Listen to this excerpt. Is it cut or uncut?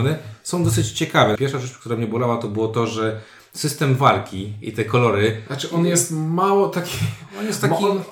cut